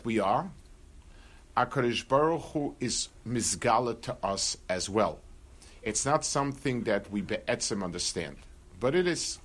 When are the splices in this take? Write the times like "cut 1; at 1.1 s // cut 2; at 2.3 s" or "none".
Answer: cut 1; at 5.8 s